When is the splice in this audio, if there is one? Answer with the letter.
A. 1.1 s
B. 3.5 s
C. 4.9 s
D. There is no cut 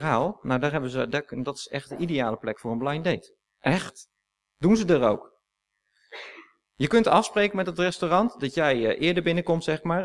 B